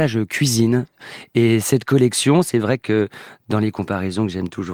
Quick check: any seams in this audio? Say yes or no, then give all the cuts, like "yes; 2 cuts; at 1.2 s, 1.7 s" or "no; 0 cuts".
no; 0 cuts